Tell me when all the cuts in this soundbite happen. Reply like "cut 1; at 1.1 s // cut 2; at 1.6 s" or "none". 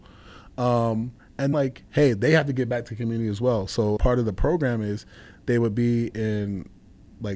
cut 1; at 1.5 s // cut 2; at 4.0 s